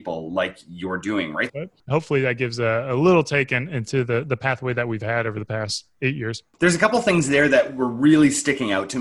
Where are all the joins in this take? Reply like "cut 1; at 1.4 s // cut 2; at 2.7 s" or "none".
cut 1; at 1.5 s

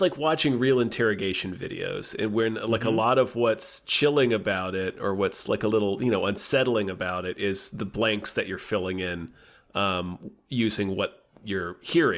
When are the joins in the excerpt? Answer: none

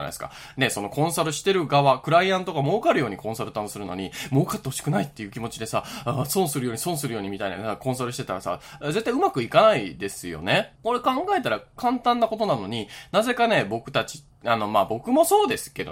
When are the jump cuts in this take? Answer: cut 1; at 10.8 s

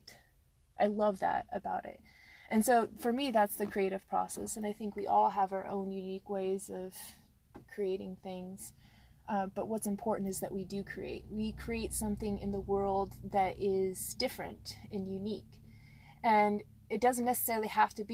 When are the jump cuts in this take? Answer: none

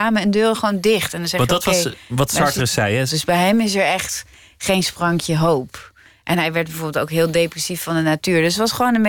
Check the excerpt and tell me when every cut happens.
cut 1; at 3.1 s

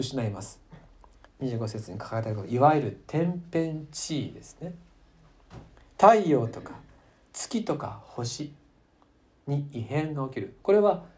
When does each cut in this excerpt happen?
cut 1; at 1.3 s

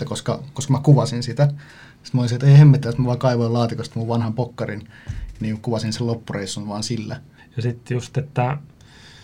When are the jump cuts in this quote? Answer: cut 1; at 2.8 s // cut 2; at 7.4 s

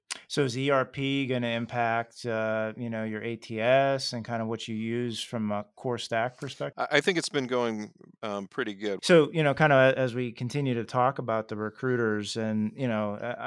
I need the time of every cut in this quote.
cut 1; at 6.7 s // cut 2; at 9.0 s

